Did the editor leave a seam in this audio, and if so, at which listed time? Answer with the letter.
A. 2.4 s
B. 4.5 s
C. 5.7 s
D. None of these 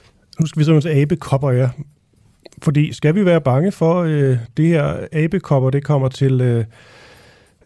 D